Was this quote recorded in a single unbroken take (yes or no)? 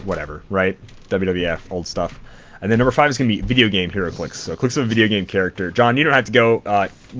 yes